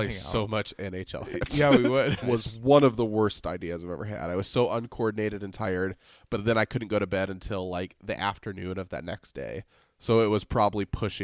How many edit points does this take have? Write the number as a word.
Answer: one